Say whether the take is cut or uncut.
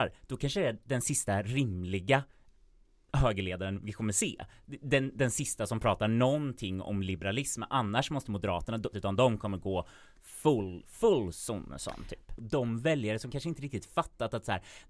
cut